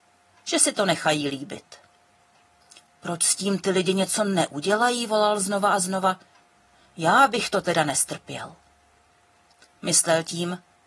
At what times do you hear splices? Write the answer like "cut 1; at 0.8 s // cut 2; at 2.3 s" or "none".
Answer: none